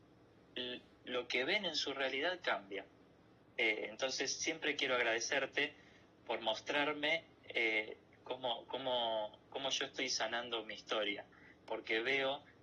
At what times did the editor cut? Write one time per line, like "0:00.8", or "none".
0:03.4